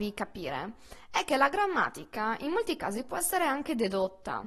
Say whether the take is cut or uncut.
uncut